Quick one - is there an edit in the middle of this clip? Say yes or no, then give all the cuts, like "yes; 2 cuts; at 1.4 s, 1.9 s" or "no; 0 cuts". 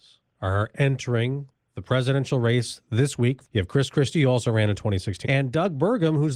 yes; 2 cuts; at 3.4 s, 5.2 s